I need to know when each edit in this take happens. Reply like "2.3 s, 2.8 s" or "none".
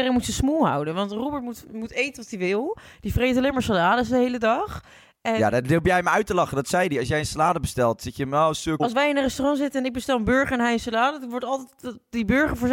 8.8 s